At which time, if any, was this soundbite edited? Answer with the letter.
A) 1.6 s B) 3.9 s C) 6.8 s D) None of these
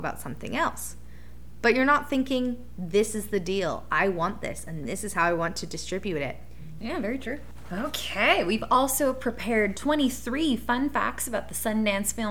C